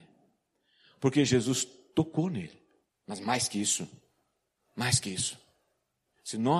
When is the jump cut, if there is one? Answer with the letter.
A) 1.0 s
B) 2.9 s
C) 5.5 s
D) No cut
B